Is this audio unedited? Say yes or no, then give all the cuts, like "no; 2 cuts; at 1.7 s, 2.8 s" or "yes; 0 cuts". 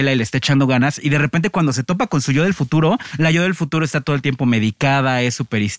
yes; 0 cuts